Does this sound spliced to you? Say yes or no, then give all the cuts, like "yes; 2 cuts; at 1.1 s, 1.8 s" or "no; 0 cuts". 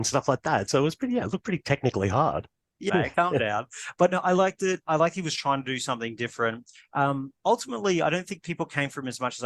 yes; 1 cut; at 2.9 s